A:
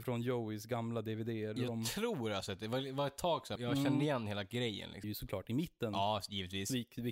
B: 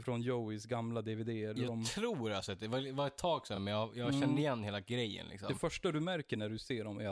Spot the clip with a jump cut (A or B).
A